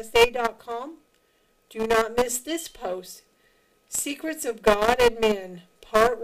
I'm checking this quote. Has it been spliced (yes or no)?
no